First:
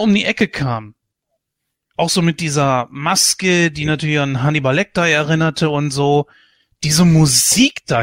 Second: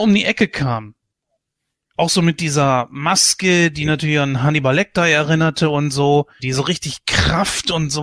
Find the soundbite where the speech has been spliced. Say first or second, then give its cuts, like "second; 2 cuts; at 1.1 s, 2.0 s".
second; 1 cut; at 6.4 s